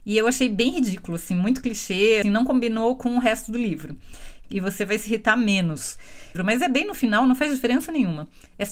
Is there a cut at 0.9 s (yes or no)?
no